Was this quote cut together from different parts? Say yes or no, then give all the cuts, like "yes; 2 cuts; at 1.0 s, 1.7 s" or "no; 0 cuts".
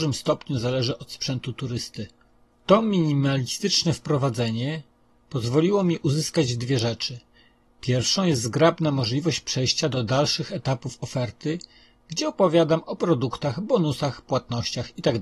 yes; 1 cut; at 2.5 s